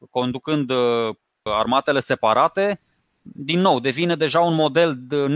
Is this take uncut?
no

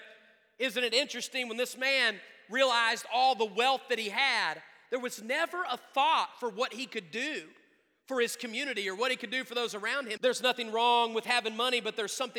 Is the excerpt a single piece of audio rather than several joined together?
no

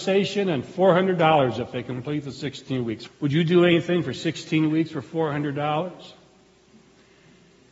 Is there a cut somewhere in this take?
yes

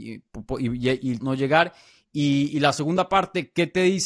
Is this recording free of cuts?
no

